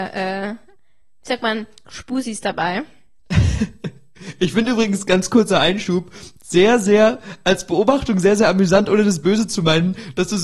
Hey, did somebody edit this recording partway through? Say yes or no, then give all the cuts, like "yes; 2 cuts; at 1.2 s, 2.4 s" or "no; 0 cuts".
no; 0 cuts